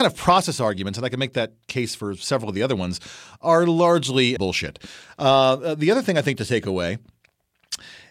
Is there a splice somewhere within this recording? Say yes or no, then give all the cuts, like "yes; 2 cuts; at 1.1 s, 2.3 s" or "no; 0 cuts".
yes; 1 cut; at 4.4 s